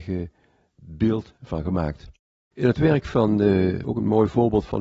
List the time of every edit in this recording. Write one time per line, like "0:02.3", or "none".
0:02.5
0:03.8